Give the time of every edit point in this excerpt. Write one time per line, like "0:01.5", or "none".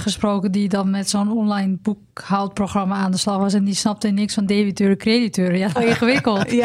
0:05.8